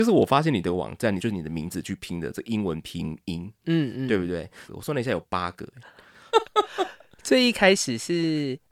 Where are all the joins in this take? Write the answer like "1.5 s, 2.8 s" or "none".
1.2 s, 4.7 s, 6.3 s